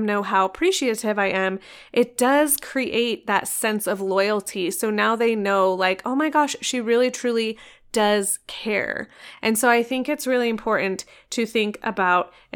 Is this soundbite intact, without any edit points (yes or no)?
yes